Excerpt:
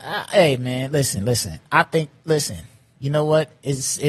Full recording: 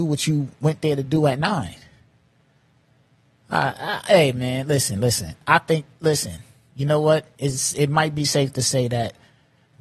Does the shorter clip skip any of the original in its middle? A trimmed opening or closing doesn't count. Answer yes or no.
no